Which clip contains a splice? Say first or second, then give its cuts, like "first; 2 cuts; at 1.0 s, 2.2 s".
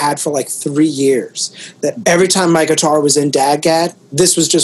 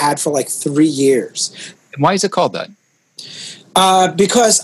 second; 1 cut; at 1.7 s